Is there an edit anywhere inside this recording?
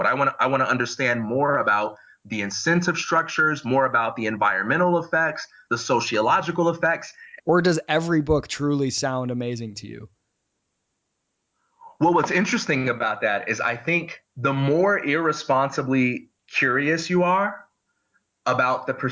yes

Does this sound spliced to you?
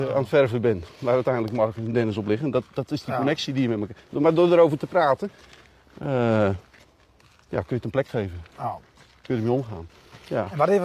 no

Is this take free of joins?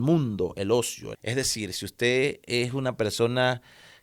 no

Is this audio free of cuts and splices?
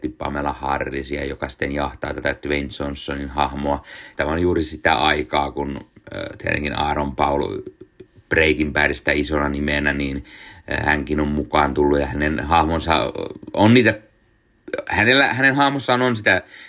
no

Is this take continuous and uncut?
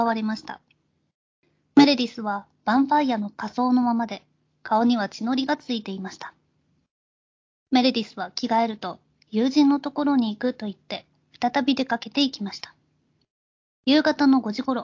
yes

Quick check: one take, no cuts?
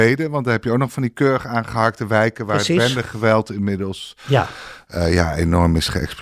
yes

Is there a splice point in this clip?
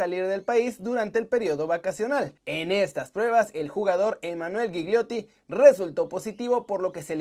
yes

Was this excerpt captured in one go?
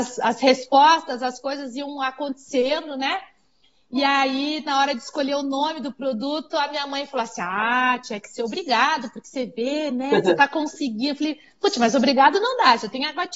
yes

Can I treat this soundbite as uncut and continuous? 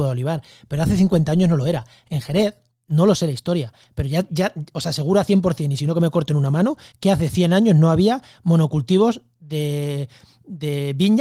yes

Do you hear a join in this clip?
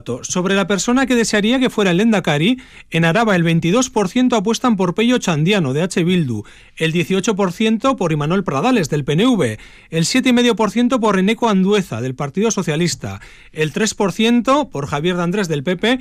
no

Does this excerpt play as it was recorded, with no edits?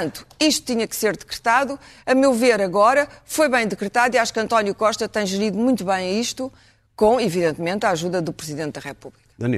yes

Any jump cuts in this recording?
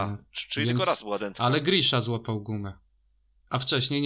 no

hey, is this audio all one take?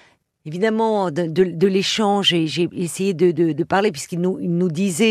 yes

